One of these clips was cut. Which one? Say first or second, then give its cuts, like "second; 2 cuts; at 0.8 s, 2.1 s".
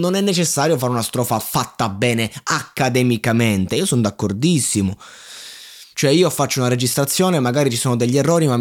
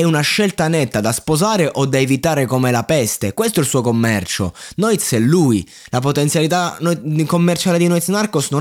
first; 1 cut; at 5.9 s